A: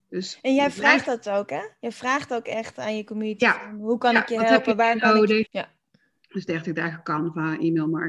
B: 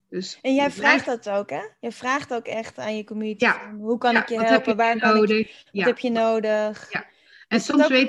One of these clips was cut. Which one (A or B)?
A